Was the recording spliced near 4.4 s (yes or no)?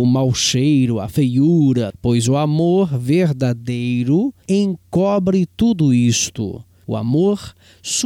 yes